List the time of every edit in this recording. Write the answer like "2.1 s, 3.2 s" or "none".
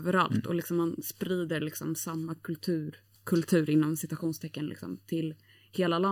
none